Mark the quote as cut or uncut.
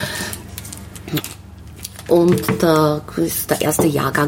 cut